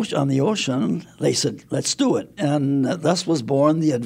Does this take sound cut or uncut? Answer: cut